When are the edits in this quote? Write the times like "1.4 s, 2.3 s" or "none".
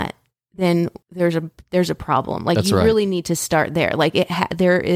1.0 s